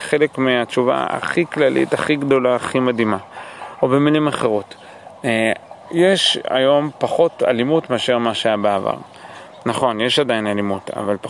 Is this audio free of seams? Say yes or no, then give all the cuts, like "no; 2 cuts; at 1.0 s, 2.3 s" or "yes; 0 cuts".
yes; 0 cuts